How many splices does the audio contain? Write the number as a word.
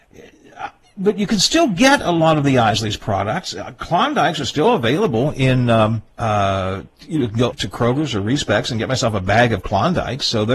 two